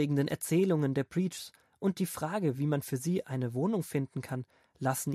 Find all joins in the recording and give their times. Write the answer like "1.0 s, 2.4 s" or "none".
none